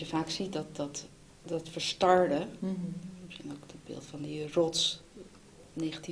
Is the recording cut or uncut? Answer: uncut